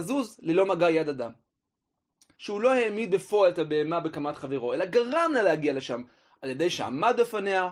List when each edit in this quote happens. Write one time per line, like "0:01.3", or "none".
0:02.3